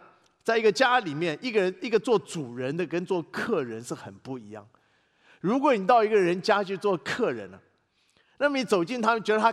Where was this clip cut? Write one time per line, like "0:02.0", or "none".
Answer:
none